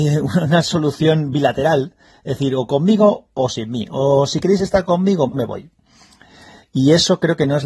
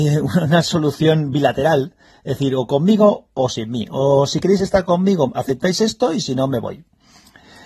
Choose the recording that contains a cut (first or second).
first